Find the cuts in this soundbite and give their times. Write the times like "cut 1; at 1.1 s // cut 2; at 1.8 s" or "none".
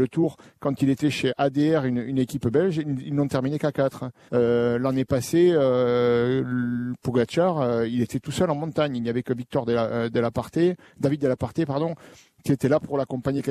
cut 1; at 4.3 s